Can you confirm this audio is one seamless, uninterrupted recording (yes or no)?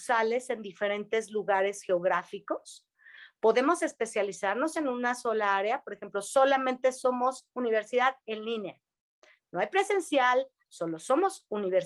no